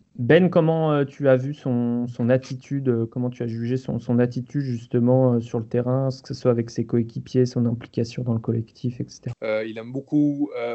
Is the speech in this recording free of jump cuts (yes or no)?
no